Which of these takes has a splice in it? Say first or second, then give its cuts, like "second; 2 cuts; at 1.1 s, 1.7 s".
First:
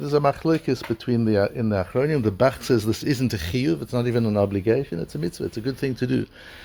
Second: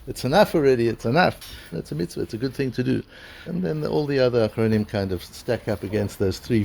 second; 2 cuts; at 1.7 s, 3.5 s